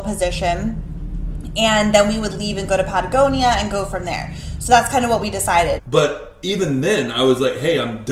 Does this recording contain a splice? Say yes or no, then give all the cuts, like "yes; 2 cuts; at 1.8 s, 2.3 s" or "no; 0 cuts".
yes; 1 cut; at 5.8 s